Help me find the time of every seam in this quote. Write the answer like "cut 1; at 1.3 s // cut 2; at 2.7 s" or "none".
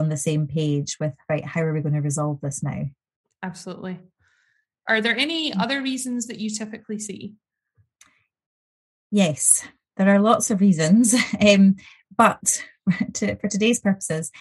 cut 1; at 4.9 s